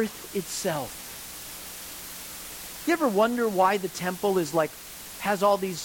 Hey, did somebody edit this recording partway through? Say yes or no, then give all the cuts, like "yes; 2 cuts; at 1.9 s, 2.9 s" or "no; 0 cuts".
no; 0 cuts